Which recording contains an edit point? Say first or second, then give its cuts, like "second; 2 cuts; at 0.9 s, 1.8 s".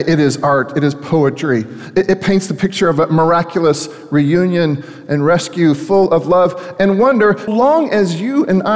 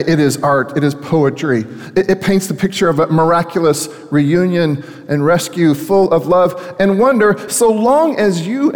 first; 1 cut; at 7.5 s